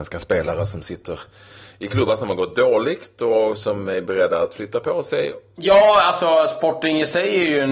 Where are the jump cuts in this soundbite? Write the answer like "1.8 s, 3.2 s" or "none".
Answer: 5.6 s